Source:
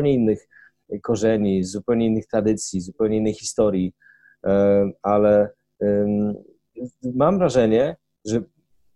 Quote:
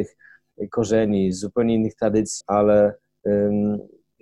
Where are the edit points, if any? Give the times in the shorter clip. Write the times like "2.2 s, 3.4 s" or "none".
2.4 s